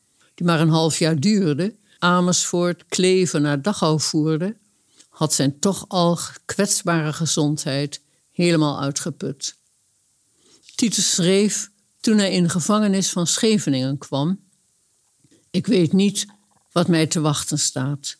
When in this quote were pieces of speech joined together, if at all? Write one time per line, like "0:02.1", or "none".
0:02.0